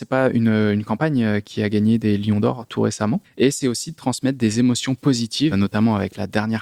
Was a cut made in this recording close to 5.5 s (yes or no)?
yes